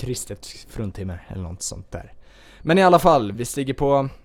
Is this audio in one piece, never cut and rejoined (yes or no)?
no